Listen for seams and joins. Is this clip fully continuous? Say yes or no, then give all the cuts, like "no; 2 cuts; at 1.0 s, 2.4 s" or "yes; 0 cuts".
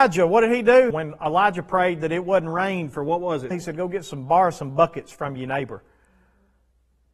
no; 2 cuts; at 0.9 s, 3.5 s